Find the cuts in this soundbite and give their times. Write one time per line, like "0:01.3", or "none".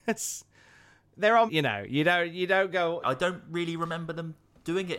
0:01.5
0:03.0